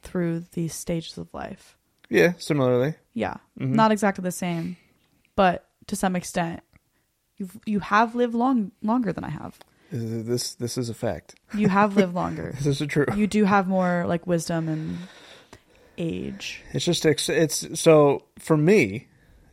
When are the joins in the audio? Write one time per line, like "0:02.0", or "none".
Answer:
0:05.2